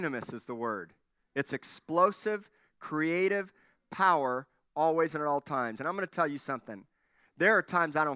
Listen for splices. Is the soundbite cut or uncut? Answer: uncut